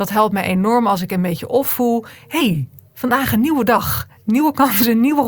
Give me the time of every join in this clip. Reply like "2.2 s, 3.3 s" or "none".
none